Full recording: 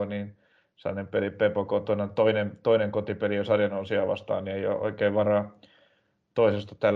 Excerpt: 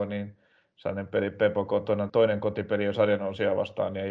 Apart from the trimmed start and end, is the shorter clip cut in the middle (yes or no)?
yes